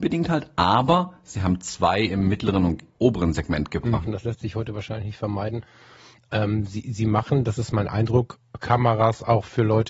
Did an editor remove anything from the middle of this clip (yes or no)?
yes